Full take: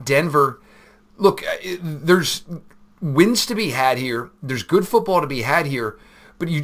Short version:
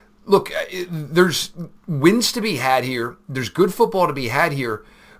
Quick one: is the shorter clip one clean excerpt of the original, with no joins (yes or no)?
no